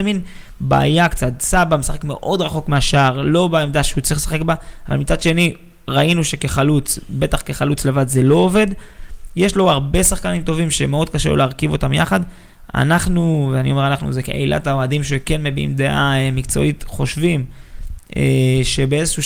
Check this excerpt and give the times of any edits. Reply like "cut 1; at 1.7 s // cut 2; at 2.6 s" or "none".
none

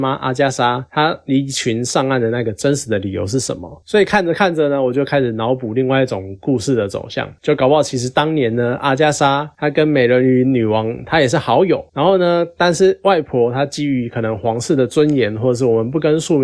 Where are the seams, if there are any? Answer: none

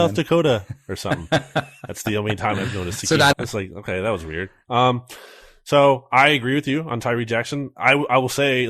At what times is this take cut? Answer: cut 1; at 3.3 s

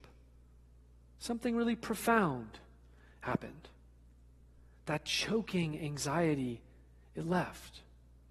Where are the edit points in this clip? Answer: none

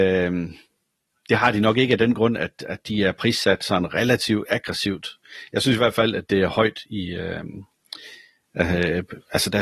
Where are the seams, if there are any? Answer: none

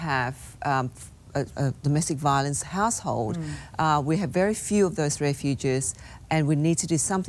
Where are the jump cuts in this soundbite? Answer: cut 1; at 1.5 s

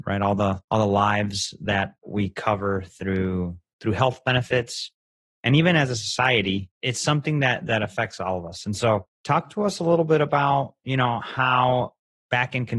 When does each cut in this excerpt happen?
cut 1; at 2.0 s

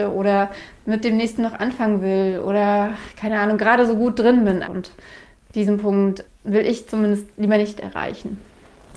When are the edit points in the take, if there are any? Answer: cut 1; at 4.6 s // cut 2; at 6.3 s

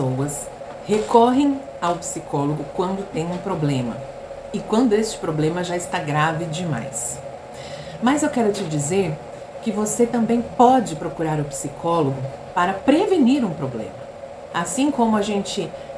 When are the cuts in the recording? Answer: cut 1; at 14.5 s

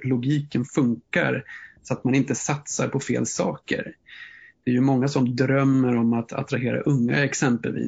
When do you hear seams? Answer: none

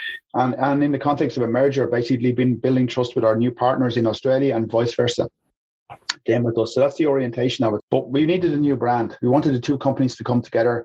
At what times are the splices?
cut 1; at 7.8 s

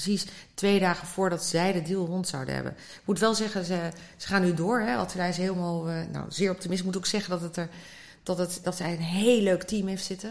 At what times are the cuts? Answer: cut 1; at 8.6 s

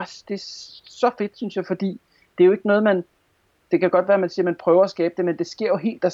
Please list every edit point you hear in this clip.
none

